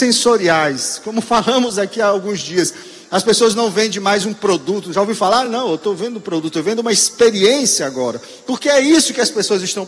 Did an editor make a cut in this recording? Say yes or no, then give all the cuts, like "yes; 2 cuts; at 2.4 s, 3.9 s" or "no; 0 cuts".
no; 0 cuts